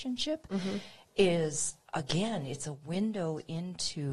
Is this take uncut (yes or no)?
yes